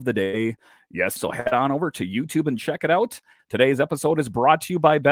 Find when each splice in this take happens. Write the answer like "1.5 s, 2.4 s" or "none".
1.2 s, 3.4 s